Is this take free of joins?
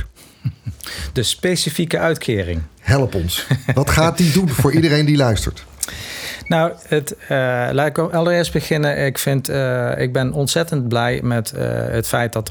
yes; 0 cuts

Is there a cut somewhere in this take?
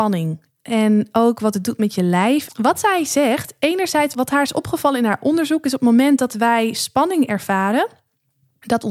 yes; 2 cuts; at 2.5 s, 4.1 s

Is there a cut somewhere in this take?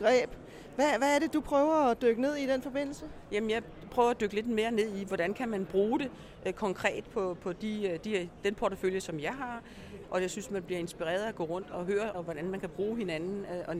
yes; 2 cuts; at 10.0 s, 12.1 s

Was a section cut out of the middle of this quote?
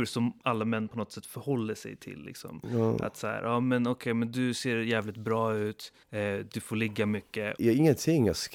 yes; 2 cuts; at 6.0 s, 7.6 s

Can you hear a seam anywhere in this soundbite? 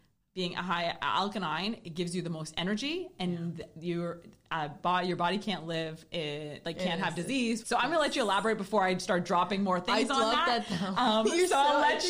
yes; 1 cut; at 7.6 s

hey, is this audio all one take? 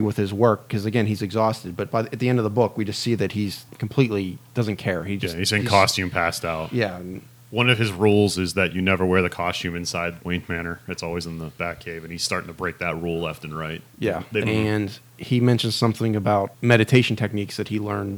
no; 1 cut; at 14.4 s

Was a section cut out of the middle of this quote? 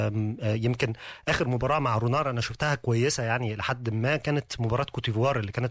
no; 0 cuts

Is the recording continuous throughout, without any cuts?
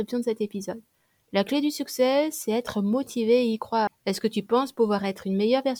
no; 1 cut; at 3.9 s

